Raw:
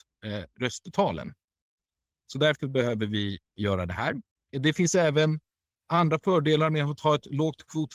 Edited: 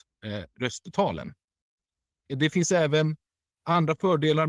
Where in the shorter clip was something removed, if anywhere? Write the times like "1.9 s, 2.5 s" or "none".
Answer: 2.2 s